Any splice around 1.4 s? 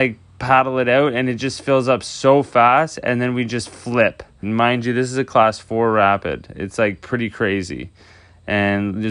no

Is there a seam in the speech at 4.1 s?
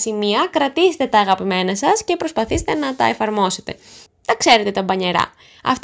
yes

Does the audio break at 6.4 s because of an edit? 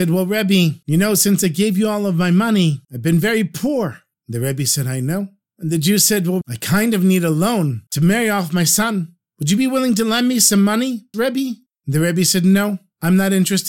yes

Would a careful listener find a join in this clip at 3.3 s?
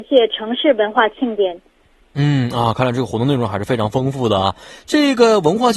no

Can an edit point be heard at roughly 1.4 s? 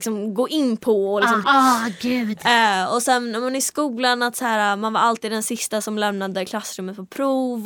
yes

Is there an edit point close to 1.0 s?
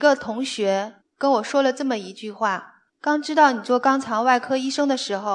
yes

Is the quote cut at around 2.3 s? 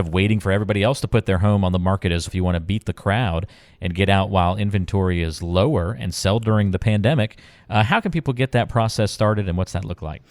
yes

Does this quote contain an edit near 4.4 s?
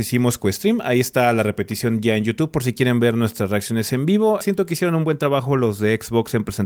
yes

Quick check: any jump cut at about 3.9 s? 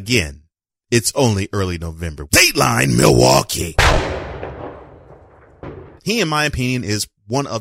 no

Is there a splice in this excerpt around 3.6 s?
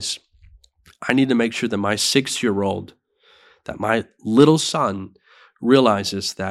no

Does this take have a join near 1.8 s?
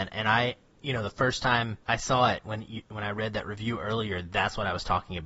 yes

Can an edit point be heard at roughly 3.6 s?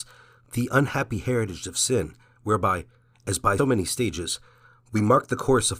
yes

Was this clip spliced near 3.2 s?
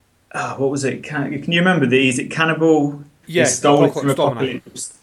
yes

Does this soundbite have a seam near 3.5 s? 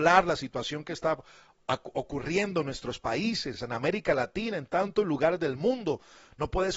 no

